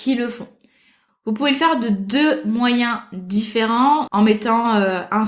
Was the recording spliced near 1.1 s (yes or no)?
yes